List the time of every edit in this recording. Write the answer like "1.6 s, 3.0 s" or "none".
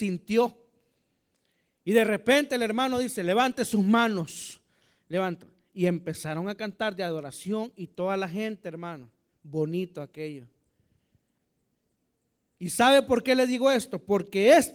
none